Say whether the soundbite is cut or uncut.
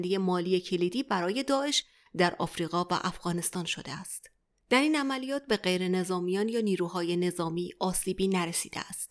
uncut